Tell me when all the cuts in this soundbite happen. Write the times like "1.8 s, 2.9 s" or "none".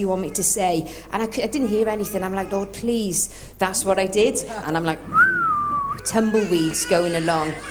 3.5 s, 4.6 s